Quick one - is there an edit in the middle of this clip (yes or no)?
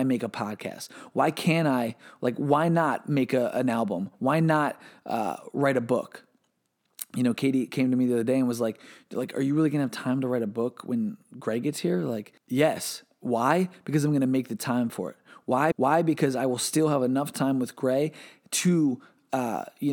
yes